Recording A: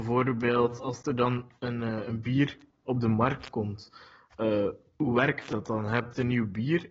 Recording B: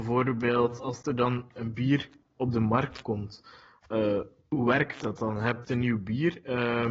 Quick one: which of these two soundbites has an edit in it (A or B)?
B